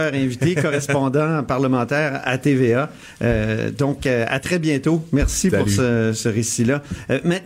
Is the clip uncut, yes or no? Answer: yes